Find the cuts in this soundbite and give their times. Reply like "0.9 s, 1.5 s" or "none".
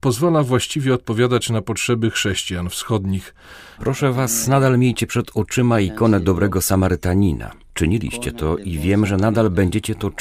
3.8 s